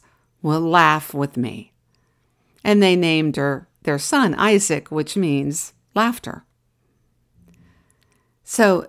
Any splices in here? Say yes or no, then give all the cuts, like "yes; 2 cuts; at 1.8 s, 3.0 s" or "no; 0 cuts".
no; 0 cuts